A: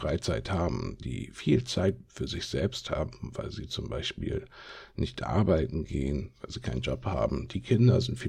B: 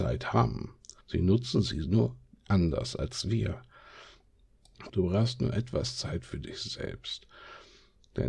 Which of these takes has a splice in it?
B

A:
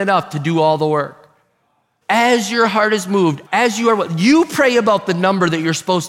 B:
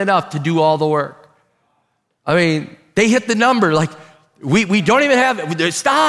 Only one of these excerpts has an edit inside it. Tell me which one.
A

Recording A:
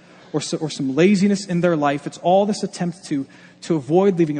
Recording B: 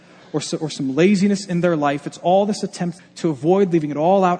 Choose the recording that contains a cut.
B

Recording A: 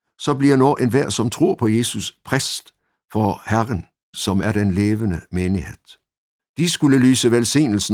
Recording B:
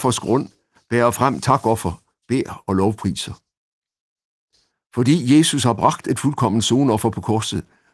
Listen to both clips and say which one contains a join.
A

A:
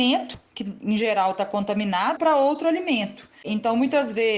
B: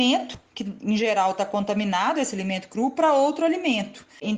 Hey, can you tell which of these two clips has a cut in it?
A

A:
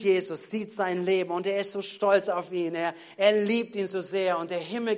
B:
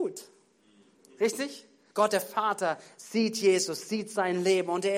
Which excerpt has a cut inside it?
B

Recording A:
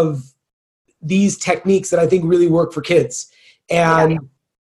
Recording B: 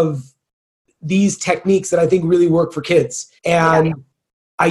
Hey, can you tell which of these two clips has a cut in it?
B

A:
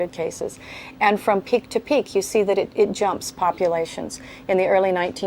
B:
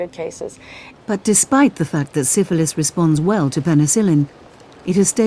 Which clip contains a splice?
B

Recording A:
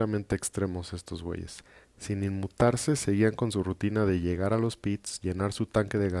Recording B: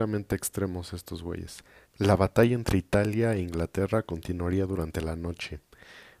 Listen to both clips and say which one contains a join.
B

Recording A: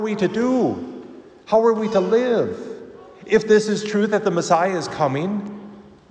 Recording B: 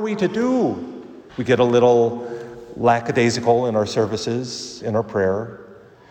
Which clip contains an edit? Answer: B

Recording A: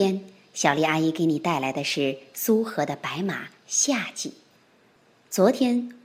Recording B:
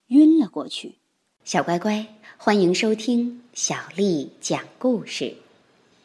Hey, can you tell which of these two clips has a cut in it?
B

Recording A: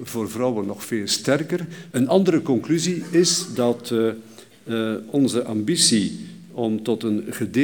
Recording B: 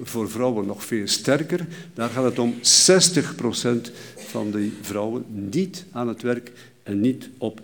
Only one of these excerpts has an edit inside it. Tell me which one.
A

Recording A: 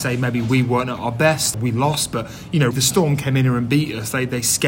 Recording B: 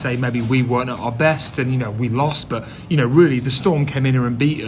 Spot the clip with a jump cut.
A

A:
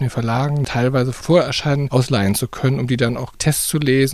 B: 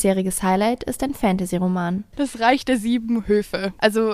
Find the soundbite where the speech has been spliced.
A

